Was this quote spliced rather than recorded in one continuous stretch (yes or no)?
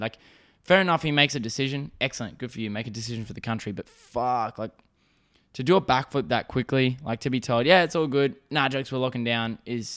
no